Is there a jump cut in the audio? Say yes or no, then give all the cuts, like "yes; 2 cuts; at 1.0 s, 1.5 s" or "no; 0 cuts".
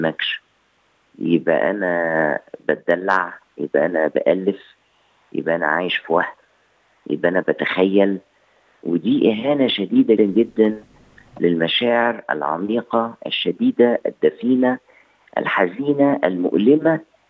yes; 1 cut; at 10.2 s